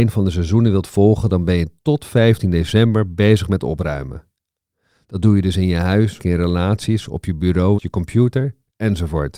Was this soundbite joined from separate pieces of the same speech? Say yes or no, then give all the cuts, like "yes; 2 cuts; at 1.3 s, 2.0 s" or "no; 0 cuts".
yes; 2 cuts; at 6.2 s, 7.8 s